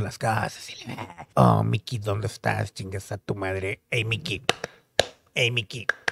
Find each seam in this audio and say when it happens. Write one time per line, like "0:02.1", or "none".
0:01.3